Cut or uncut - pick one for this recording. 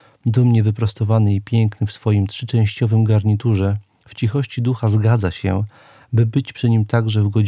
uncut